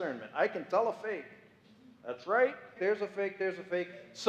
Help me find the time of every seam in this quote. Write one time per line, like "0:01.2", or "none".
0:02.8